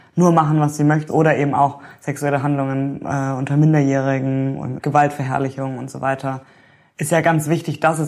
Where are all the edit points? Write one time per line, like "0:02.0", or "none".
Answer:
0:01.1